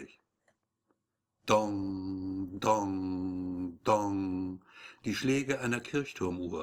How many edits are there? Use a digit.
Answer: 0